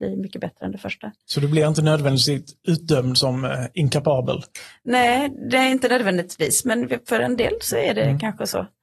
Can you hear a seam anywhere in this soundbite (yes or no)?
no